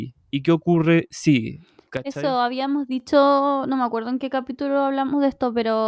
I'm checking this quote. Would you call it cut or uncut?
uncut